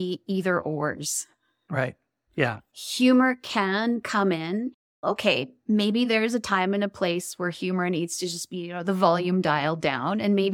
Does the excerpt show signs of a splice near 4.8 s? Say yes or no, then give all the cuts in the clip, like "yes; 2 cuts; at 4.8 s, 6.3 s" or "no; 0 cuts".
no; 0 cuts